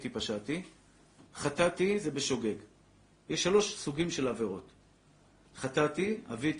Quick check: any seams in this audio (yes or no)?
yes